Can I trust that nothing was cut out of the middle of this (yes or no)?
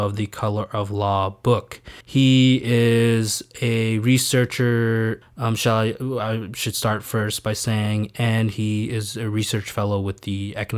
no